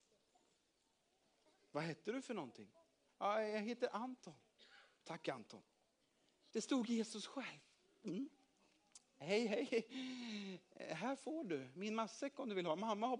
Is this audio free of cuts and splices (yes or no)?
no